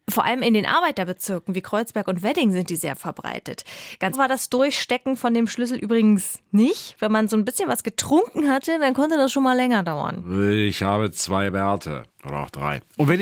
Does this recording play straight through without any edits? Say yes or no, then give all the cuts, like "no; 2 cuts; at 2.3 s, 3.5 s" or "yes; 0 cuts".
no; 1 cut; at 4.1 s